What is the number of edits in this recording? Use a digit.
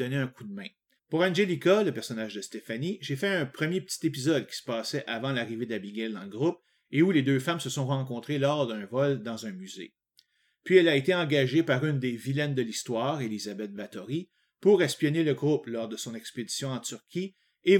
1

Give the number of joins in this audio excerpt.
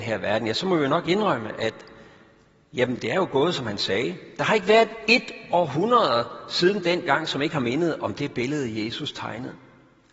0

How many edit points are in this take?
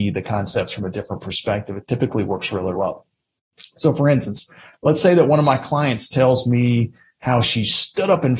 1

